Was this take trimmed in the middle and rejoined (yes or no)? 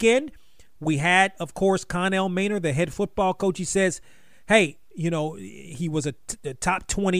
no